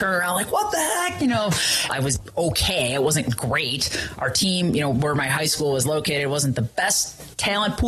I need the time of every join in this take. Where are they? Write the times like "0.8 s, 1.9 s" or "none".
1.9 s